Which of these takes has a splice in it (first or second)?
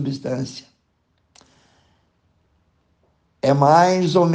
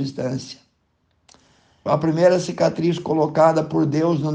second